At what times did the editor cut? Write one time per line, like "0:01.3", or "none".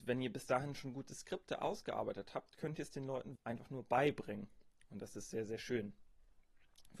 0:03.4